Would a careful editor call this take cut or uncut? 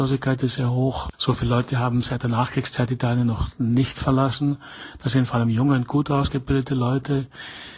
cut